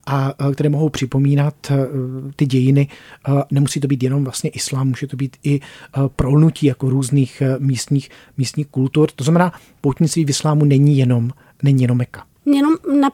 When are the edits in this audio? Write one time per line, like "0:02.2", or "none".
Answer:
none